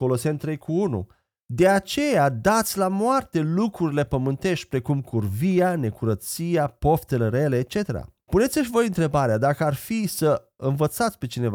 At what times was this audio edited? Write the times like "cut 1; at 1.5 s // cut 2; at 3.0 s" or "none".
cut 1; at 8.3 s